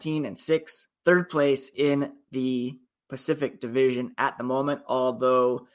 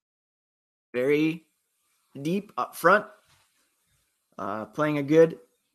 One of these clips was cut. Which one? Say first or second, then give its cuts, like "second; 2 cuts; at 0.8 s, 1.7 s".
first; 1 cut; at 0.9 s